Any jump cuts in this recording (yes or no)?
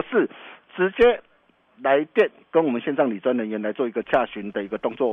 no